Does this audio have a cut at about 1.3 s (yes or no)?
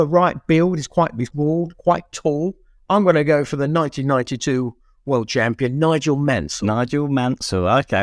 yes